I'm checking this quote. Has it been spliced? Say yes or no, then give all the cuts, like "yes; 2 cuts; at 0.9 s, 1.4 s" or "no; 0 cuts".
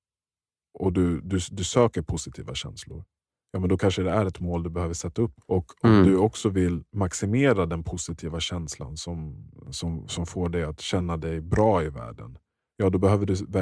no; 0 cuts